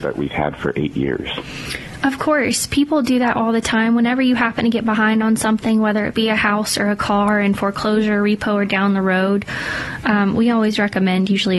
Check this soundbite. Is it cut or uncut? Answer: uncut